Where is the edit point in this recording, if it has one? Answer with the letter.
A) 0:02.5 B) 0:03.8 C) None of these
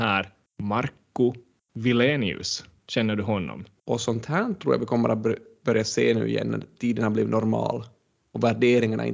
B